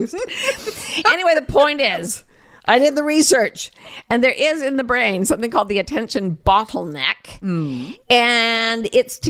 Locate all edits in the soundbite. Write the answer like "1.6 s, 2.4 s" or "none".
none